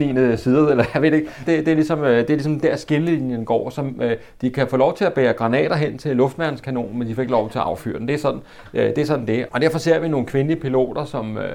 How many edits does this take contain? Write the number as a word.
two